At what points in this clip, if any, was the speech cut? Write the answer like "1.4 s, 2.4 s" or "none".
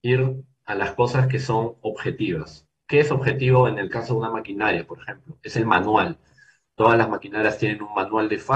none